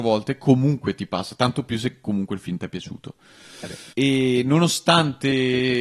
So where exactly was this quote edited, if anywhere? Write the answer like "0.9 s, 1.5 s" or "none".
3.9 s